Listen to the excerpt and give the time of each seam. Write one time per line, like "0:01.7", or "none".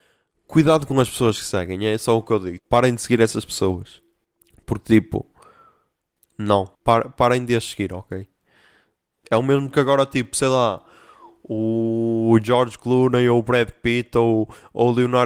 0:02.6
0:06.7
0:09.2